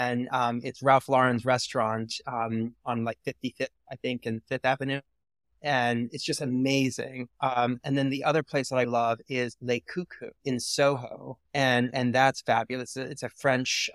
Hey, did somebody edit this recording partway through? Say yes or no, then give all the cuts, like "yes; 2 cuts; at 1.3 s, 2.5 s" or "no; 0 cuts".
yes; 3 cuts; at 8.8 s, 10.4 s, 11.5 s